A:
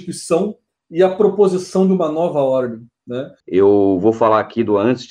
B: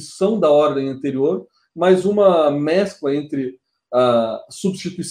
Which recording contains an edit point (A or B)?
A